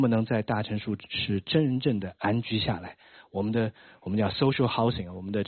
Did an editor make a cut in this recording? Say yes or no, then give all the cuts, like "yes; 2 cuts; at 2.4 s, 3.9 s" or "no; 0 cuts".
no; 0 cuts